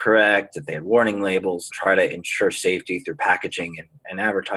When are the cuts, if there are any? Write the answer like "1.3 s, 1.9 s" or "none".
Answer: 1.7 s